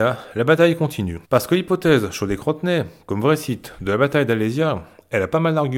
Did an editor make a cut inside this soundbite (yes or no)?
yes